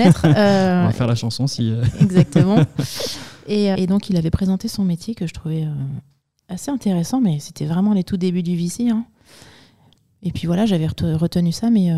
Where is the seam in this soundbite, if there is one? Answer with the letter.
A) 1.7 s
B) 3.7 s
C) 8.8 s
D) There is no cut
B